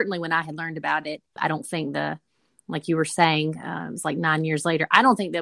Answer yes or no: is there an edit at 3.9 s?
no